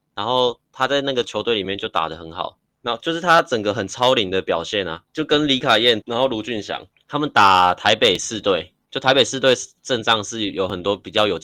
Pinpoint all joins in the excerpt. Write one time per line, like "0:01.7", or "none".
0:06.0